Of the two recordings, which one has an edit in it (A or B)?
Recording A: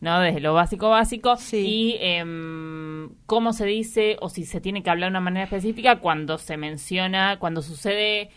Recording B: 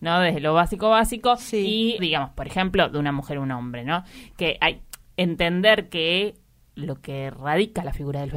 B